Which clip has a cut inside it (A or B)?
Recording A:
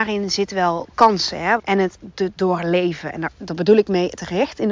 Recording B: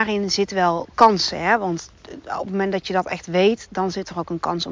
A